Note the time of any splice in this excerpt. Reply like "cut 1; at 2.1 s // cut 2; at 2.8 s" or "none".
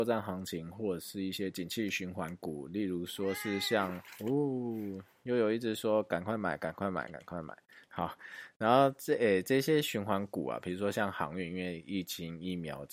cut 1; at 7.8 s